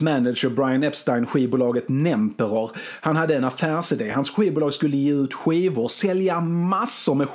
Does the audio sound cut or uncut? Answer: uncut